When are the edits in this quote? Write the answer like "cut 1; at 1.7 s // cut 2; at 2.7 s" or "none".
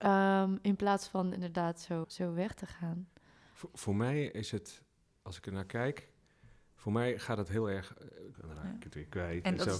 cut 1; at 2.0 s // cut 2; at 8.3 s